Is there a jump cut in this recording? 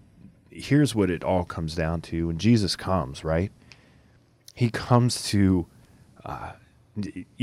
no; 0 cuts

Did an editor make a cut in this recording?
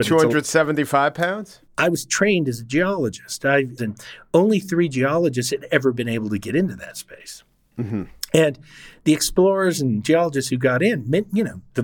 yes; 2 cuts; at 1.6 s, 3.8 s

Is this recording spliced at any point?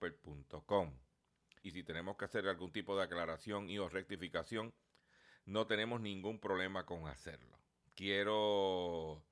yes; 1 cut; at 1.6 s

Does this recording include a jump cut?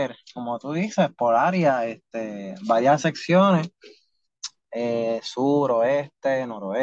no; 0 cuts

